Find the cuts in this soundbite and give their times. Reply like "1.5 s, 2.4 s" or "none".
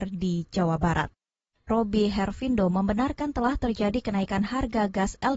1.7 s